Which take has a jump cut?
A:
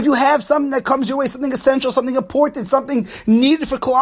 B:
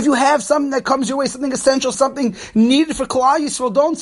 B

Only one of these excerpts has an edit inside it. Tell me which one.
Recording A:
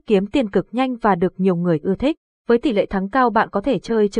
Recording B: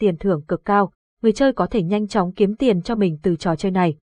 A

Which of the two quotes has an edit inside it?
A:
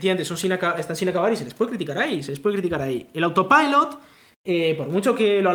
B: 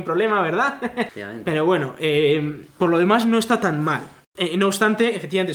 B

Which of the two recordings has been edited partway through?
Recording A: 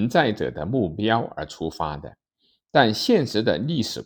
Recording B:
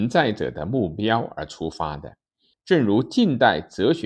B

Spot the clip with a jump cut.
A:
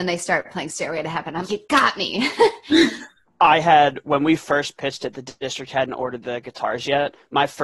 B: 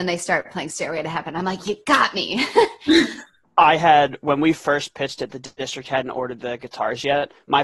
A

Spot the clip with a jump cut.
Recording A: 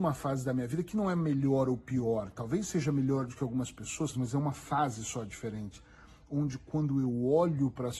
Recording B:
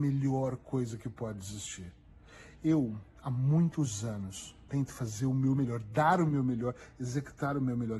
A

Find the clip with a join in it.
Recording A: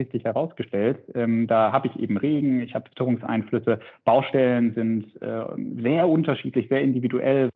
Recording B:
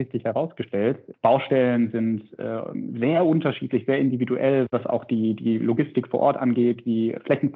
B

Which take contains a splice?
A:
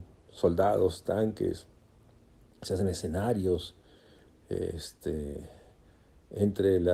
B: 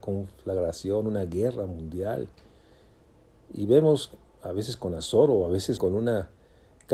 B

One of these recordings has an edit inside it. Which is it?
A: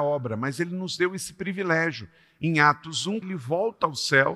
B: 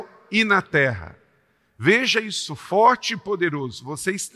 A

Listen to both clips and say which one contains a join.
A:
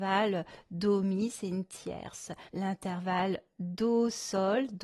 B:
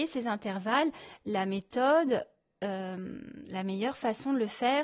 A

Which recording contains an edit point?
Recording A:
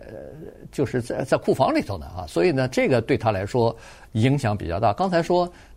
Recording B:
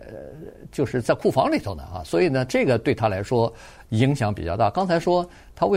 B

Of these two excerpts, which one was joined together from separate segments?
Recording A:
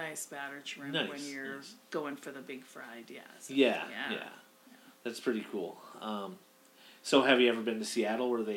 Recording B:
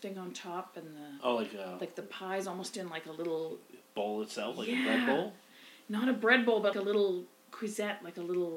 B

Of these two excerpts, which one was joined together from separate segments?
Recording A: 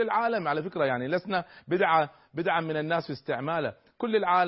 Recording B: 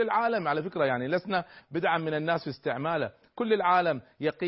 B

